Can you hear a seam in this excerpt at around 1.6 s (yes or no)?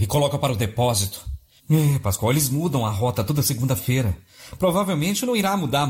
yes